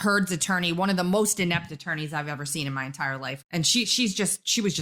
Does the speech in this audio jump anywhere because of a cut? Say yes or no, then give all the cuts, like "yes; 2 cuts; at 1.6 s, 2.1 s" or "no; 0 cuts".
yes; 1 cut; at 3.4 s